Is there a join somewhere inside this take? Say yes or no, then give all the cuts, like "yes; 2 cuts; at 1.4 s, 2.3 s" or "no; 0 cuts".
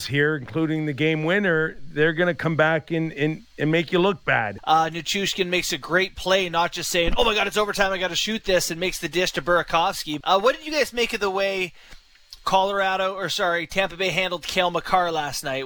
yes; 2 cuts; at 4.6 s, 10.2 s